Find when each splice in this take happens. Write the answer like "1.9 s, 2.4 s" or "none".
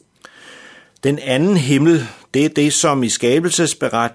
none